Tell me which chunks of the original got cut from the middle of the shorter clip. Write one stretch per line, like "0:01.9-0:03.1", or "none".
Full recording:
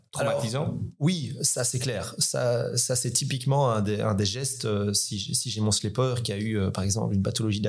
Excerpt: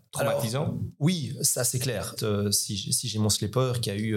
0:02.2-0:04.6